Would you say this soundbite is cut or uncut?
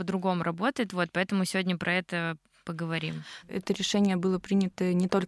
cut